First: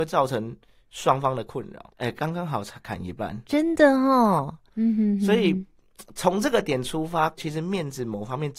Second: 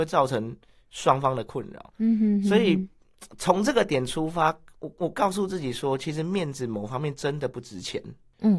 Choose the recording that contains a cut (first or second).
first